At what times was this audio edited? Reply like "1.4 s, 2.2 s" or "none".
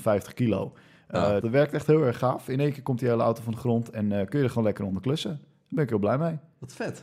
1.4 s